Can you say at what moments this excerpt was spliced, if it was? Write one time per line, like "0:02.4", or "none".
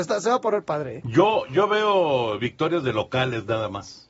none